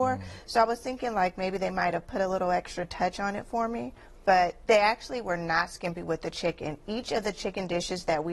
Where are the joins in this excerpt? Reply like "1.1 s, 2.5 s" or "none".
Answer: none

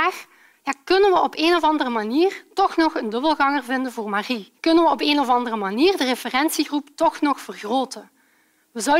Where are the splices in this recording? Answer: 4.6 s

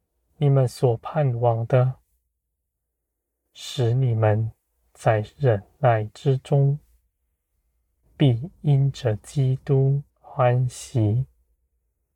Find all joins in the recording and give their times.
8.0 s, 10.1 s

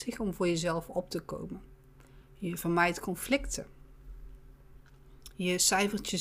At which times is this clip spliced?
none

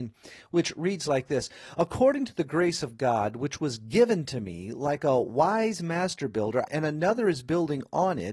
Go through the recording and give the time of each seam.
6.7 s

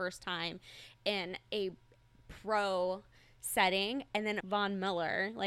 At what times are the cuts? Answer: 4.4 s

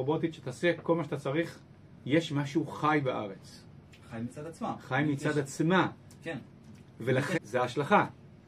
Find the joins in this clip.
2.0 s, 7.3 s

